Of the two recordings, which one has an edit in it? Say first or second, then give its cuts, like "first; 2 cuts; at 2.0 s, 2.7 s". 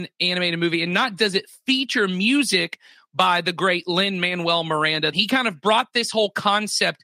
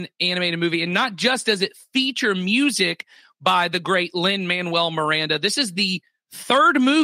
first; 2 cuts; at 1.2 s, 5.1 s